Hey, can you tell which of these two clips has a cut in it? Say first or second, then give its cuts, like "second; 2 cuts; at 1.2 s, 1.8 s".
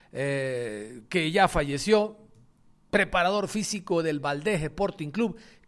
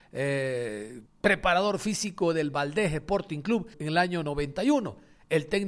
second; 2 cuts; at 1.1 s, 3.7 s